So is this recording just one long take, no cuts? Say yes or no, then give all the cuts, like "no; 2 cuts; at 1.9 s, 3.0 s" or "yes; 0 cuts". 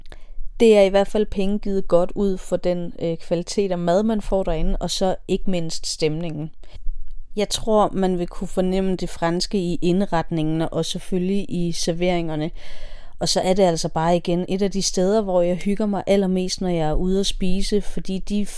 yes; 0 cuts